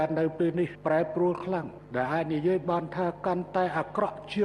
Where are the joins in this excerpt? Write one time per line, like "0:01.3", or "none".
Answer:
none